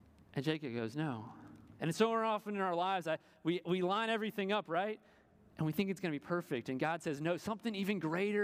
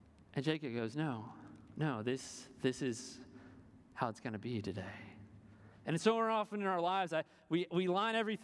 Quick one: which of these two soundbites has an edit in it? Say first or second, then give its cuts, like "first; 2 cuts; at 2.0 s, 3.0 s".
first; 1 cut; at 1.7 s